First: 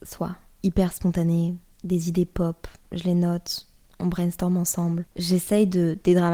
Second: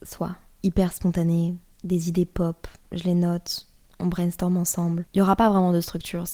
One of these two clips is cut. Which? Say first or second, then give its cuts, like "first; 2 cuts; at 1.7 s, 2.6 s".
first; 1 cut; at 5.1 s